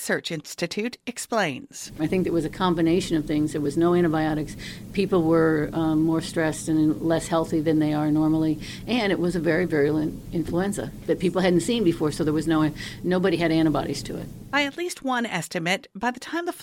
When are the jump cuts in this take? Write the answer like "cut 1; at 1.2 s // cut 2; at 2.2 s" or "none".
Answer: none